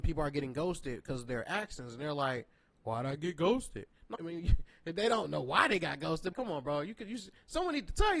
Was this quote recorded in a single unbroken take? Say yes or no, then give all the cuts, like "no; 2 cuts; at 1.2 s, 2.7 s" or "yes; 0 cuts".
no; 2 cuts; at 4.1 s, 6.3 s